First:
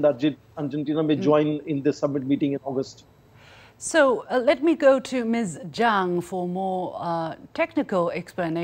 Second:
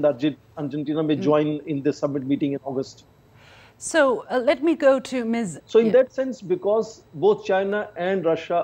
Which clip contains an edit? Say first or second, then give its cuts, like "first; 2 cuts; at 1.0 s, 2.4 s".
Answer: second; 2 cuts; at 5.6 s, 7.1 s